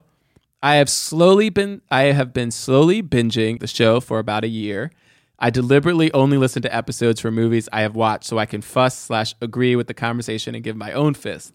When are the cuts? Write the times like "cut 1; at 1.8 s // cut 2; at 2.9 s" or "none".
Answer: cut 1; at 3.6 s